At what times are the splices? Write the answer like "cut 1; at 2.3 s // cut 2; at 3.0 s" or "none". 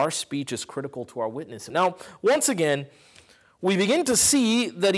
cut 1; at 1.7 s